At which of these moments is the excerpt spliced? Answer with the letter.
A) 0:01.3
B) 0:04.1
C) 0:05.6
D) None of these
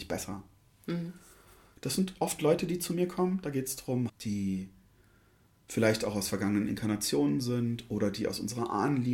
B